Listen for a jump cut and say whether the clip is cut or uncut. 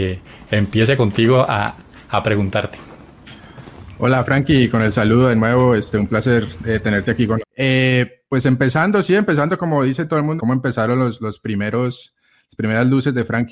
cut